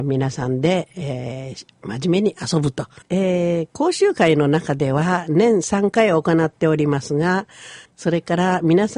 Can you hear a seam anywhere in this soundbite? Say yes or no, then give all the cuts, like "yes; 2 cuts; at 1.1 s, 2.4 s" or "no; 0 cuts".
yes; 2 cuts; at 3.0 s, 7.8 s